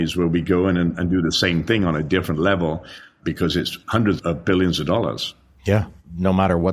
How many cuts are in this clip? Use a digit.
1